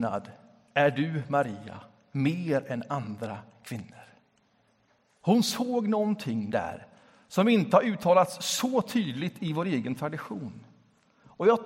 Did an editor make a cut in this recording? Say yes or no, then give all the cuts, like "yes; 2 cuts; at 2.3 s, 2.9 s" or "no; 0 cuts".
no; 0 cuts